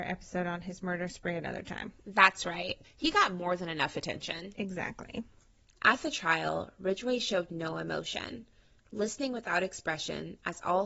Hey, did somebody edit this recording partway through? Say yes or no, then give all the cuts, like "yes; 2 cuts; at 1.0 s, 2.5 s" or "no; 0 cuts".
yes; 1 cut; at 2.8 s